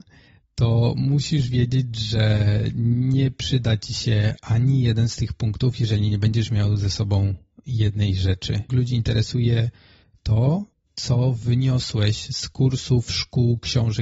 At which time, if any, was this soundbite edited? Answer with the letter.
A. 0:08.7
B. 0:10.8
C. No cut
A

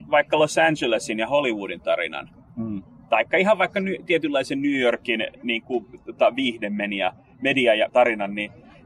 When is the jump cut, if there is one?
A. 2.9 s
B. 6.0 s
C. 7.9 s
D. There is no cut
C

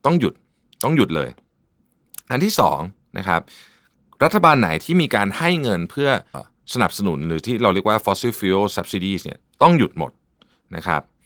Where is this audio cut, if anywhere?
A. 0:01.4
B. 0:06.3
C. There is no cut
B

